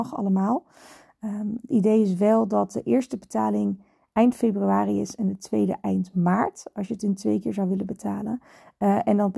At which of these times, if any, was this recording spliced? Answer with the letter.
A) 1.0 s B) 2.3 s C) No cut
C